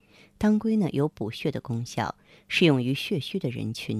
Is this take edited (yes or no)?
no